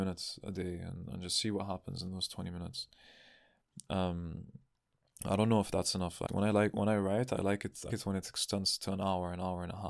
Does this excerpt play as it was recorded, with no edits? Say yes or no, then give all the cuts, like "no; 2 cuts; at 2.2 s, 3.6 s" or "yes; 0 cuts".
no; 2 cuts; at 6.3 s, 7.9 s